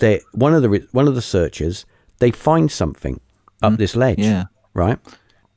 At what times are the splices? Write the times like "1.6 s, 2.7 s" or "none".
3.6 s